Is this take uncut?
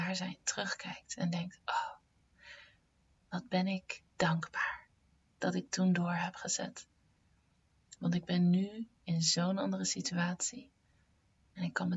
yes; 0 cuts

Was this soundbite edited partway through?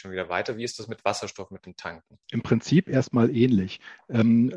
yes; 1 cut; at 2.2 s

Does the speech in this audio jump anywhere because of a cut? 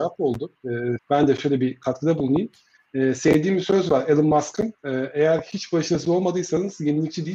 yes; 1 cut; at 1.0 s

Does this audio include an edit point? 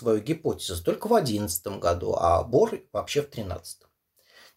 no; 0 cuts

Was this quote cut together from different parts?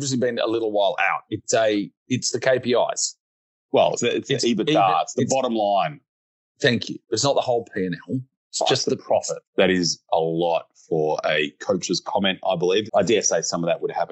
yes; 3 cuts; at 4.0 s, 9.4 s, 12.9 s

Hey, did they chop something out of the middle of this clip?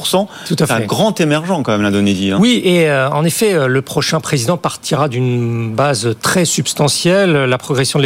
no; 0 cuts

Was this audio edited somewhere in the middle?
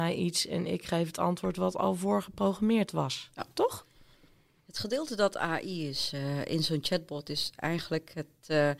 no; 0 cuts

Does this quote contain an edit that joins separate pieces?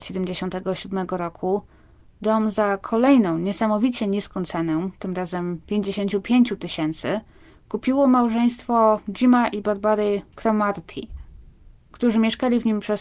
no; 0 cuts

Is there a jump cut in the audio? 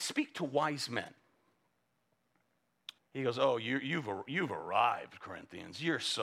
yes; 1 cut; at 3.0 s

